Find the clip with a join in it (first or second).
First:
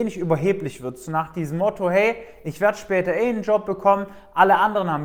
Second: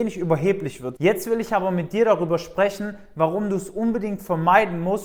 second